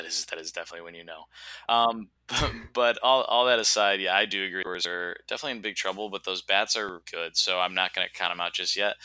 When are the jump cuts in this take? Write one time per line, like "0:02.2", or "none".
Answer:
0:07.0